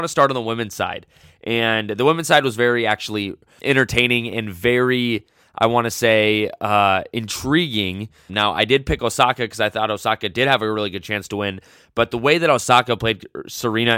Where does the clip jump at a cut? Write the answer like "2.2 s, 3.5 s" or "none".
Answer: 3.6 s, 8.3 s